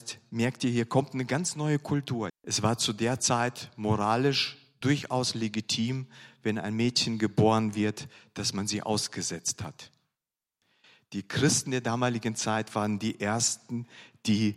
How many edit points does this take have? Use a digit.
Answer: 1